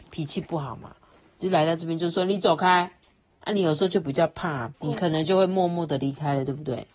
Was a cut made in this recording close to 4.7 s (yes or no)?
yes